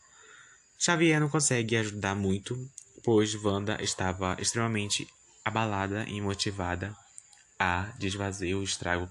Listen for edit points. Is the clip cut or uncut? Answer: uncut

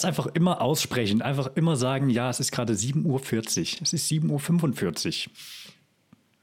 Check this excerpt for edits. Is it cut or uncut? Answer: uncut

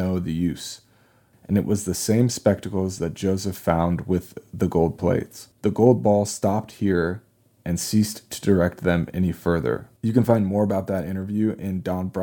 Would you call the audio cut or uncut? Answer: cut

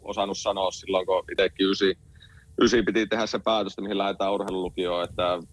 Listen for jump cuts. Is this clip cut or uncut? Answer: uncut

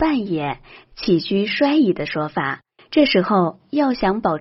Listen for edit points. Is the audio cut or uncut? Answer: cut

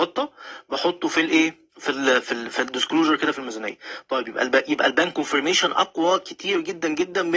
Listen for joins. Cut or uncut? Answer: cut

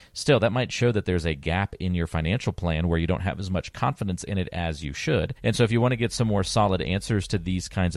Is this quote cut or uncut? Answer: cut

